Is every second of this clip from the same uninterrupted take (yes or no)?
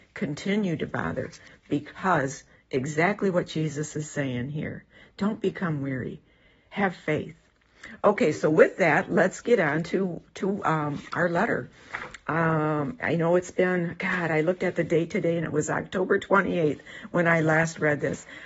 yes